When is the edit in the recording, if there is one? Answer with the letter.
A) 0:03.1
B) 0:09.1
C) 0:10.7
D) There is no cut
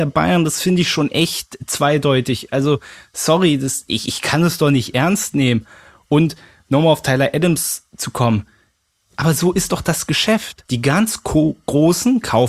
C